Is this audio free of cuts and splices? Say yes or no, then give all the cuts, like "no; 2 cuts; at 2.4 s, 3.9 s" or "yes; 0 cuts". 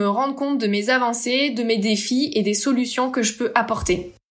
yes; 0 cuts